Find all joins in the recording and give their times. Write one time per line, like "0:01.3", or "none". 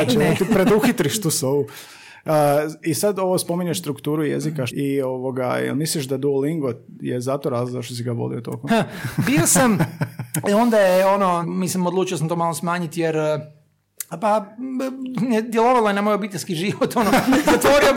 0:04.7
0:08.7
0:11.4